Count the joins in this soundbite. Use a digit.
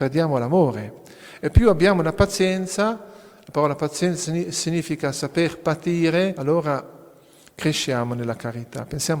1